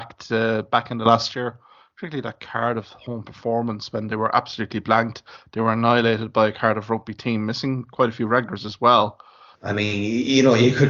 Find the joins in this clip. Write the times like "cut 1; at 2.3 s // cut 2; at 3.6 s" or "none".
cut 1; at 9.5 s